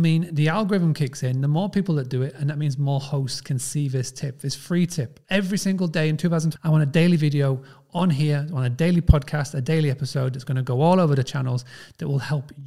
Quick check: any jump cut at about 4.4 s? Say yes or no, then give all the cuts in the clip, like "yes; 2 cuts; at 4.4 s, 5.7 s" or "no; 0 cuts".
no; 1 cut; at 6.6 s